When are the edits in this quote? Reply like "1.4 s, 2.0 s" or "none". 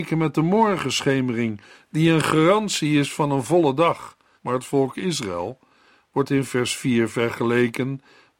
4.4 s